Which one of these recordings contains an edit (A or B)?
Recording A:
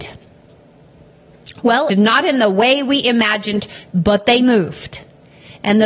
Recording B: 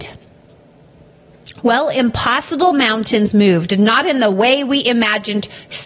A